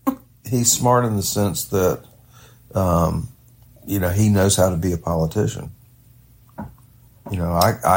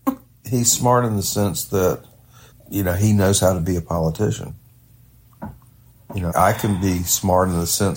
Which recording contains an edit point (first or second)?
second